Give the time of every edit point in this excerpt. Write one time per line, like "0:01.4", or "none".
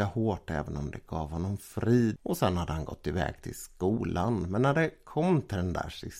0:02.2